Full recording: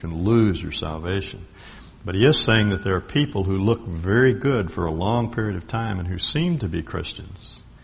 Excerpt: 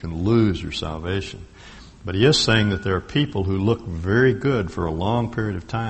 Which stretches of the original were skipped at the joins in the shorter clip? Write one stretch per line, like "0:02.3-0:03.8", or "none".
none

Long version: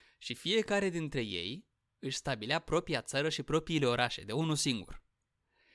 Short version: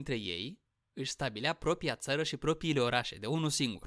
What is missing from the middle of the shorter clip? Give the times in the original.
none

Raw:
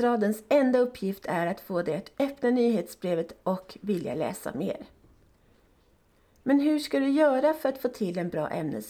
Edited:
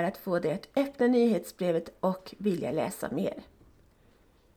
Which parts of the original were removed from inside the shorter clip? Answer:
none

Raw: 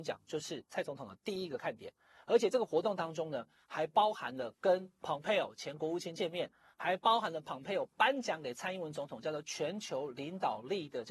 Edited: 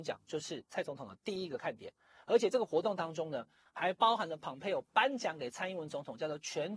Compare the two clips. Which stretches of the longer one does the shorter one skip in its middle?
0:03.7-0:06.7

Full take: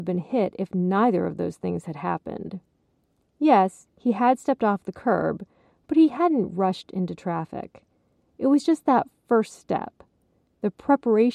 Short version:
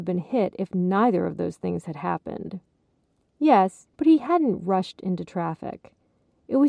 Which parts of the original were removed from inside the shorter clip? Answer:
0:03.9-0:05.8

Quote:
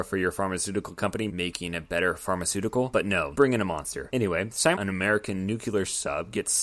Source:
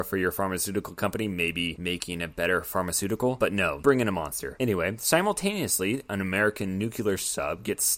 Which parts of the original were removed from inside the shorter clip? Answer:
0:01.3-0:01.8
0:05.2-0:06.1

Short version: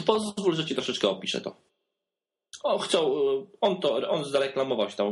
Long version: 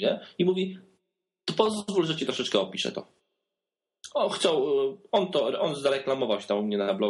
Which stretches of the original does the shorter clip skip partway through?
none

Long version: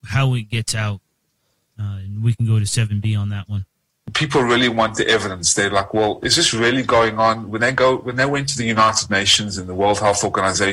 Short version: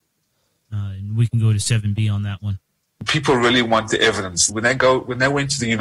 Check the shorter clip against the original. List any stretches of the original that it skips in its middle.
0:05.5-0:07.5

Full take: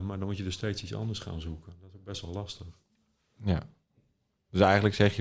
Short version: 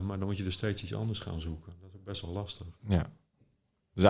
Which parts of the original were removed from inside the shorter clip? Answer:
0:02.8-0:03.3

